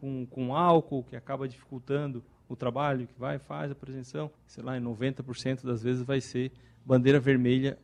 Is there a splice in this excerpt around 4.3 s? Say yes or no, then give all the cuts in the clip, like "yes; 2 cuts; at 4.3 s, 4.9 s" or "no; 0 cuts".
yes; 1 cut; at 4.3 s